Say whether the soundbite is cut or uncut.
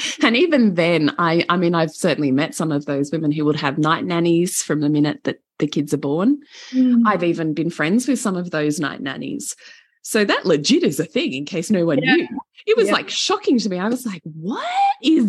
uncut